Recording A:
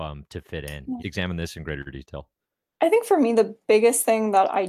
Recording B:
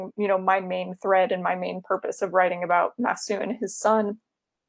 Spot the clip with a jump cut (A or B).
A